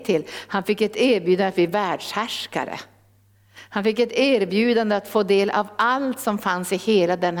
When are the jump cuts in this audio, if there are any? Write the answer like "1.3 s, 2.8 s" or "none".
none